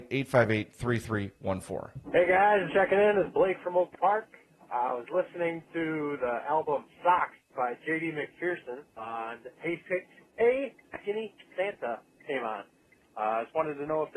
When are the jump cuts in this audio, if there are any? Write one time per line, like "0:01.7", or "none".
0:02.7
0:08.9